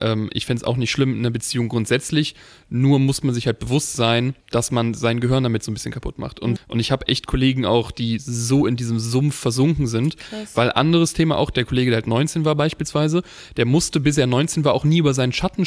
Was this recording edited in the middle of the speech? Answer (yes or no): yes